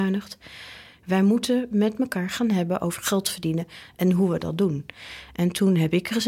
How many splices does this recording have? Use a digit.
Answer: 1